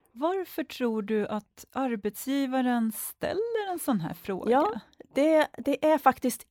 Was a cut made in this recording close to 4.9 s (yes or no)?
no